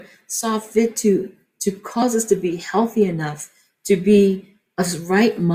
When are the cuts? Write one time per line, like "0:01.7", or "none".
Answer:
none